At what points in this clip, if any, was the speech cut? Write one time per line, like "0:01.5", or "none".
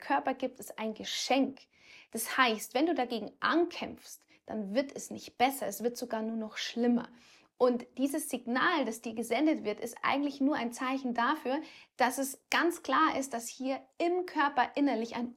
none